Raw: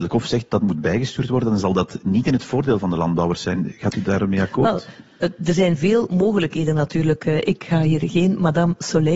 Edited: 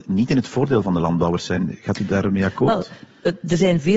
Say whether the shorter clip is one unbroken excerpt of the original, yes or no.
yes